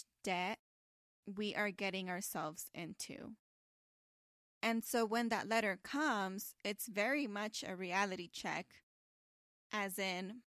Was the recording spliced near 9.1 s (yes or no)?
no